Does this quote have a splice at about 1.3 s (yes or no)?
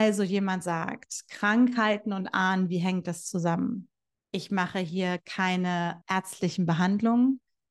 no